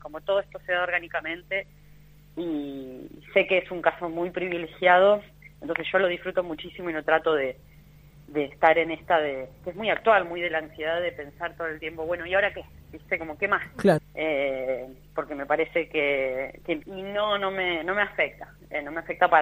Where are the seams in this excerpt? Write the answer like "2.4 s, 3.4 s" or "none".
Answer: 14.0 s, 16.8 s